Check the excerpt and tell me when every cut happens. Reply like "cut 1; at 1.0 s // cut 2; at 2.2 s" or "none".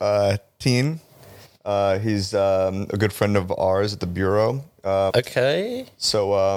cut 1; at 5.1 s